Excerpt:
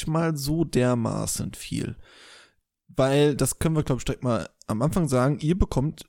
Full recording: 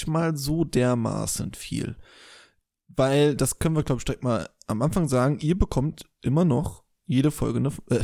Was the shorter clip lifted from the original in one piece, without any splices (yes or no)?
yes